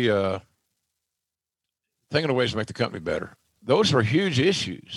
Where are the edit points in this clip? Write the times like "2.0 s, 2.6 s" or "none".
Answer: 3.6 s